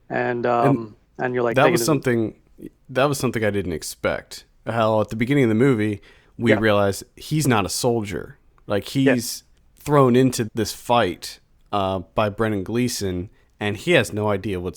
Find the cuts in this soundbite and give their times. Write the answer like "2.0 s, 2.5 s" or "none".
10.5 s